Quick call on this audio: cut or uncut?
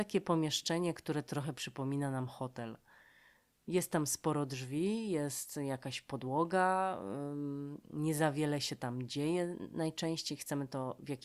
uncut